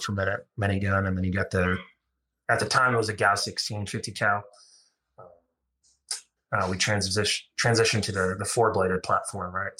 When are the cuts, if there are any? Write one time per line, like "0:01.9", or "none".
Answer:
0:06.4